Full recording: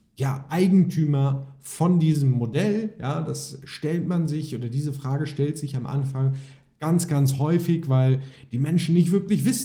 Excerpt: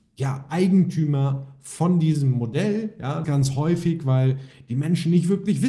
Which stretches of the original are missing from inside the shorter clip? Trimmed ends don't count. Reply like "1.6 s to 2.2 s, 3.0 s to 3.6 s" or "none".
3.2 s to 7.1 s